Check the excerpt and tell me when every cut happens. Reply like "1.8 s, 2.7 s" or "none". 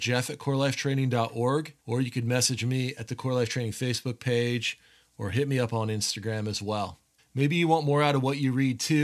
1.8 s, 7.2 s